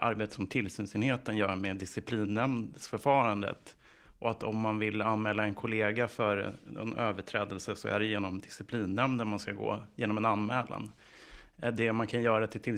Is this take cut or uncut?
uncut